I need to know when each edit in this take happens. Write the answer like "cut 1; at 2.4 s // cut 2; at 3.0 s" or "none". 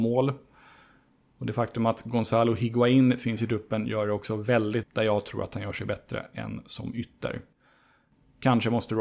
cut 1; at 4.8 s

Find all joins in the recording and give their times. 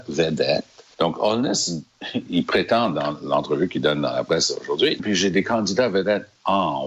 cut 1; at 0.9 s // cut 2; at 5.0 s

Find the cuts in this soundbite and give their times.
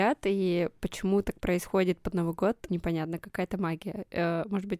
cut 1; at 2.7 s

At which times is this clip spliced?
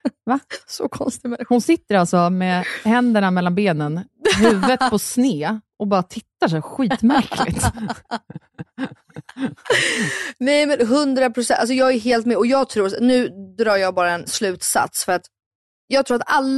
cut 1; at 14.3 s

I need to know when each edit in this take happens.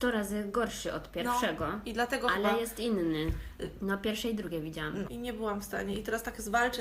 cut 1; at 3.8 s // cut 2; at 5.0 s

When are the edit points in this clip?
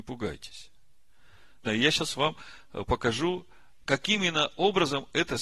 cut 1; at 1.6 s

